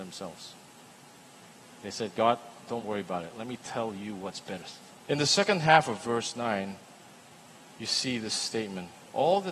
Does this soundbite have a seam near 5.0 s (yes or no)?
yes